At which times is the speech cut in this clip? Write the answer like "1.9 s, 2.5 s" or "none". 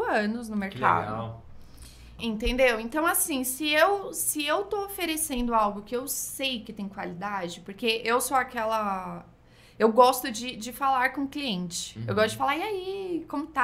2.2 s